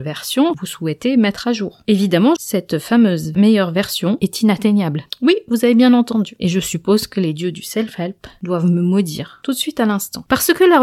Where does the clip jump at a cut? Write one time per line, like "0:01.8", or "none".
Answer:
0:02.4